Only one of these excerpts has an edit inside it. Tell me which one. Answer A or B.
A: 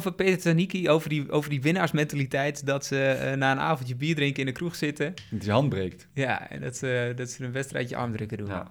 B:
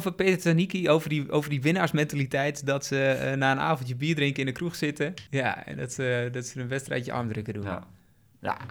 B